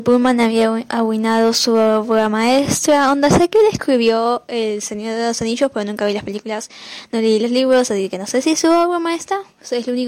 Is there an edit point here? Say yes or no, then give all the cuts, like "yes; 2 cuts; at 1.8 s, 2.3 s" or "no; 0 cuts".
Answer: no; 0 cuts